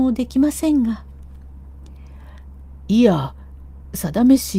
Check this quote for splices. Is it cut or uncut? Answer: uncut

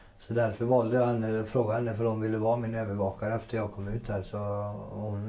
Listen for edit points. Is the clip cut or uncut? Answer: uncut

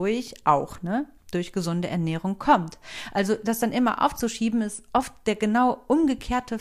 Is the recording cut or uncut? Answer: uncut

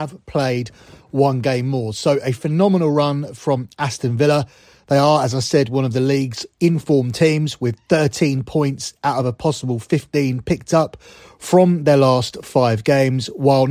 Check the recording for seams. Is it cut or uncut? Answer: uncut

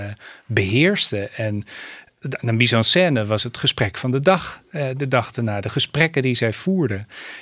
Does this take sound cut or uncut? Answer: uncut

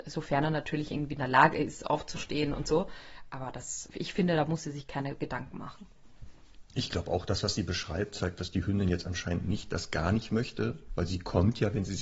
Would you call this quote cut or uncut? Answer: cut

